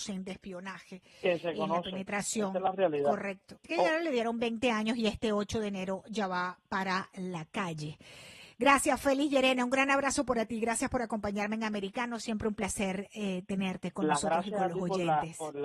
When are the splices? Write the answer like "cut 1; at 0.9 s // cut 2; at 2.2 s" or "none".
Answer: cut 1; at 3.6 s